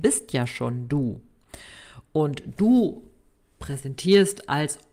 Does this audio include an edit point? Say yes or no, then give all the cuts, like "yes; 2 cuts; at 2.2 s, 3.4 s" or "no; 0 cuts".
no; 0 cuts